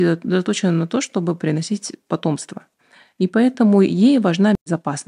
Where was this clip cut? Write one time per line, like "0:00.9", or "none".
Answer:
none